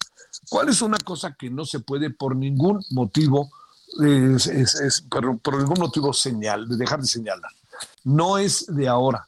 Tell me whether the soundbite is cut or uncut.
cut